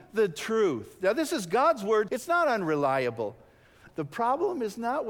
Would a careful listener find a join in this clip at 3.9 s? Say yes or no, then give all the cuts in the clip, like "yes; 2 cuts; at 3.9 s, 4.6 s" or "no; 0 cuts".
yes; 2 cuts; at 2.1 s, 3.9 s